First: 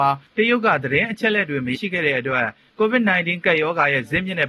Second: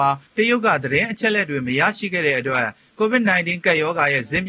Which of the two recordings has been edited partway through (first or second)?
first